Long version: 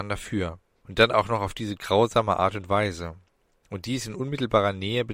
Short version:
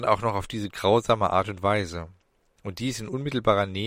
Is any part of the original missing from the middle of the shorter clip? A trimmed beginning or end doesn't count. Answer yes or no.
no